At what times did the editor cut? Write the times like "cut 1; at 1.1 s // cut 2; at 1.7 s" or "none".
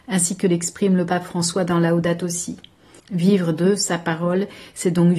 cut 1; at 3.0 s